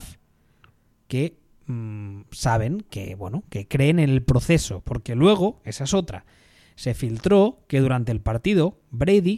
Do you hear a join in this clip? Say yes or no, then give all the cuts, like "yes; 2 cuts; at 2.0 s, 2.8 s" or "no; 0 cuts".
no; 0 cuts